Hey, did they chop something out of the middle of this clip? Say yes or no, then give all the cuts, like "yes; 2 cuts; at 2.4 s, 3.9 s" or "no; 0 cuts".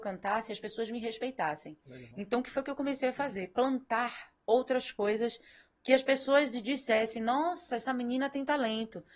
no; 0 cuts